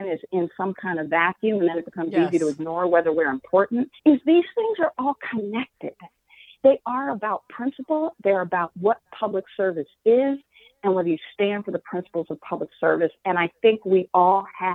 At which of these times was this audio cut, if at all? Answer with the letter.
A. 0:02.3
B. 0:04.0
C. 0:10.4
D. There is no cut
B